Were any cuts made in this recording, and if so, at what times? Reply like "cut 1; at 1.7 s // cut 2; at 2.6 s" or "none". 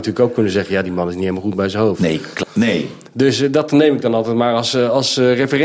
cut 1; at 2.4 s